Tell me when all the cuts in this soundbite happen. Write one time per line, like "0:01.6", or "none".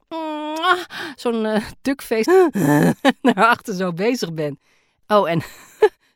0:02.2
0:04.9